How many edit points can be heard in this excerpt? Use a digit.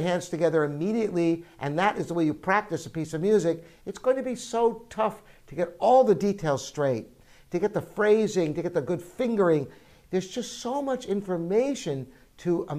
0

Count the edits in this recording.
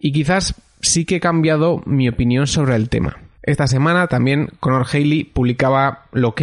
1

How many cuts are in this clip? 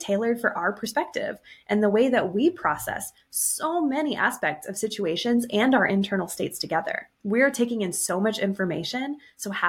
1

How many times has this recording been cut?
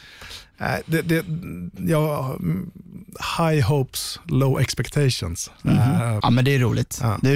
1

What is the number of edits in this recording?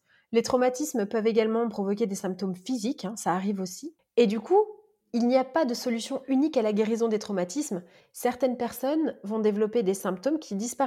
1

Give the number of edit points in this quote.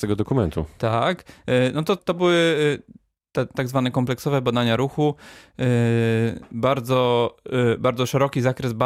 2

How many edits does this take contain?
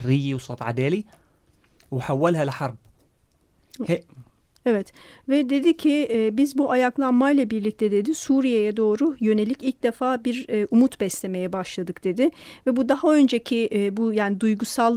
0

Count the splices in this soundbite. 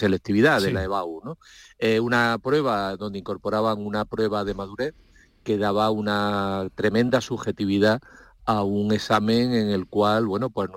0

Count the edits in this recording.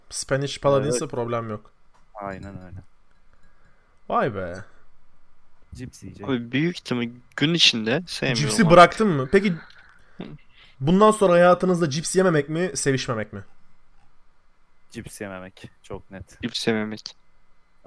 2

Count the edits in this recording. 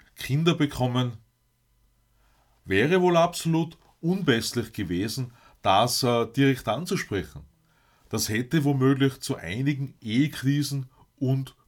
0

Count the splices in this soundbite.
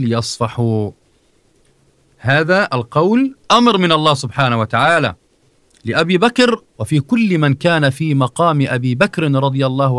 2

